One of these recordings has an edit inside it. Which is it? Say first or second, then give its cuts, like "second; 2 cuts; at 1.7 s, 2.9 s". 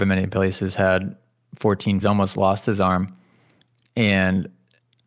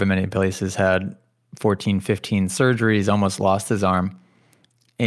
first; 1 cut; at 2.0 s